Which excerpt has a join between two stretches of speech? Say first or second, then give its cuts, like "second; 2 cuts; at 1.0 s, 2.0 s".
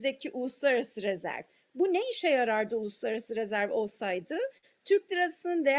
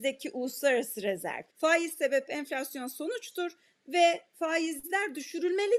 second; 1 cut; at 1.5 s